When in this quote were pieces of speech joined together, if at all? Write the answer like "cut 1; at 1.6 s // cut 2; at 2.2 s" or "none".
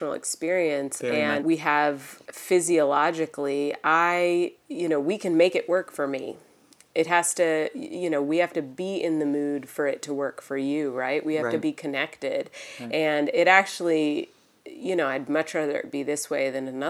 cut 1; at 1.4 s